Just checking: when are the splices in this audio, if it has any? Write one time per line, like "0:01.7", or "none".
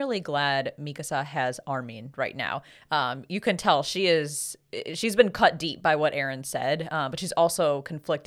none